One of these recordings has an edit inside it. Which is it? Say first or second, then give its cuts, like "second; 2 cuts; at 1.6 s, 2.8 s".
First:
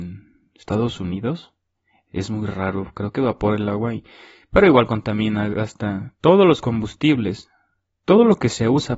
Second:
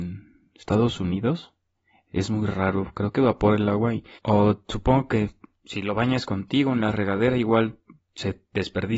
second; 1 cut; at 4.2 s